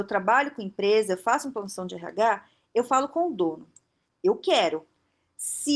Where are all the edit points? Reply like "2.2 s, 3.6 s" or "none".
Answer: 4.1 s